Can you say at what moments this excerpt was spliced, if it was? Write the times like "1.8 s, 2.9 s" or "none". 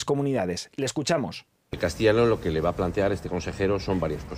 none